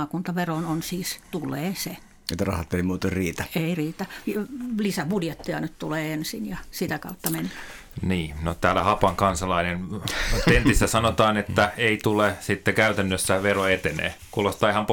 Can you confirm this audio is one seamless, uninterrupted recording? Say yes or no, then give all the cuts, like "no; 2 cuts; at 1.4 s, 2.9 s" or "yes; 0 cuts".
no; 1 cut; at 1.2 s